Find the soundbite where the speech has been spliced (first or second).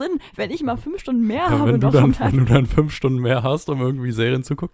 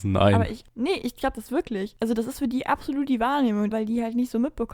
second